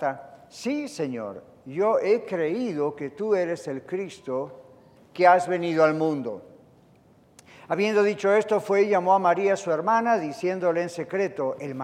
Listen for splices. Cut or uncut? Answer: cut